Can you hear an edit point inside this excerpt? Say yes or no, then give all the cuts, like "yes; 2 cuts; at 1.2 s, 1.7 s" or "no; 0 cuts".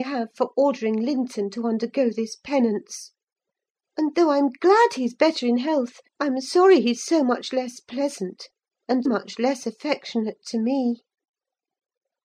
yes; 2 cuts; at 6.1 s, 9.1 s